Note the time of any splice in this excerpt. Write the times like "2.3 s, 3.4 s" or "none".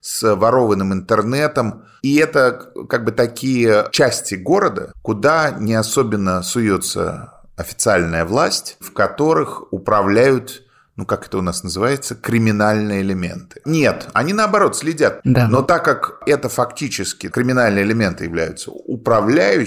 13.6 s, 15.2 s, 17.3 s